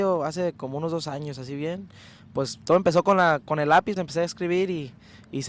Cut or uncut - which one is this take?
cut